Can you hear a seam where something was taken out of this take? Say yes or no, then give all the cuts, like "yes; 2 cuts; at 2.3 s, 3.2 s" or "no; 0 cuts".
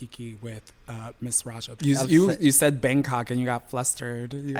yes; 1 cut; at 1.8 s